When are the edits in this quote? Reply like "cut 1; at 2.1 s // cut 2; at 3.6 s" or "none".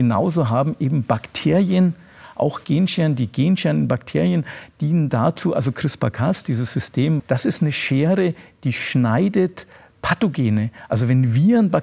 cut 1; at 7.2 s